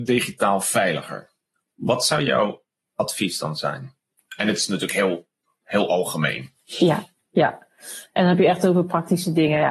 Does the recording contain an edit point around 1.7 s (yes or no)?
no